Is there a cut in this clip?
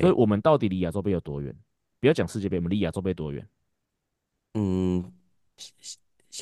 no; 0 cuts

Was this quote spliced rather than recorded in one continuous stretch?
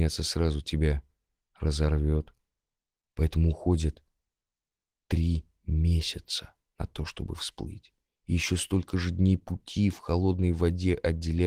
no; 0 cuts

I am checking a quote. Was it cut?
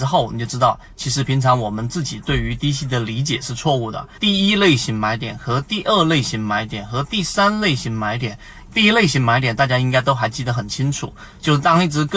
yes; 2 cuts; at 4.2 s, 8.7 s

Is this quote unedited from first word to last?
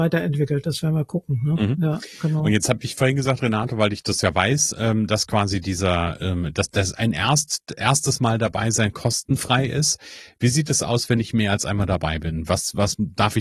yes; 0 cuts

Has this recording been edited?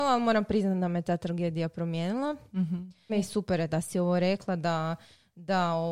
yes; 1 cut; at 3.1 s

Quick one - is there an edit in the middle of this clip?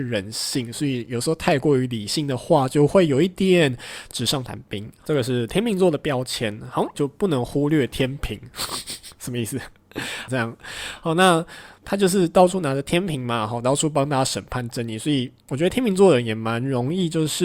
yes; 2 cuts; at 6.9 s, 10.3 s

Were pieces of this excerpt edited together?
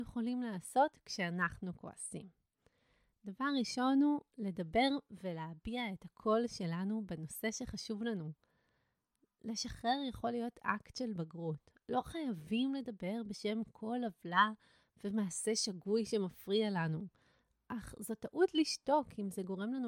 no; 0 cuts

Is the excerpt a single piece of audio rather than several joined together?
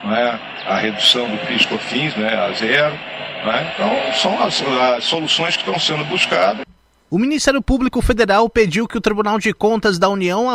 no; 1 cut; at 7.0 s

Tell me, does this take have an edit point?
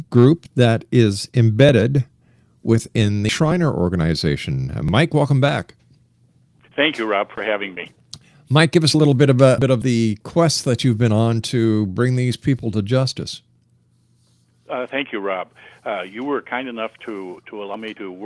yes; 1 cut; at 9.6 s

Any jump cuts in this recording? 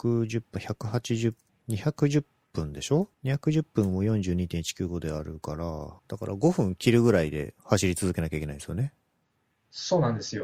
yes; 3 cuts; at 1.5 s, 3.1 s, 6.0 s

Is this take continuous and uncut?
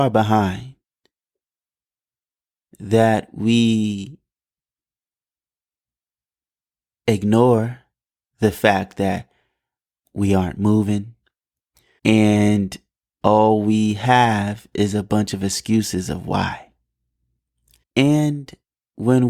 no; 2 cuts; at 12.0 s, 17.8 s

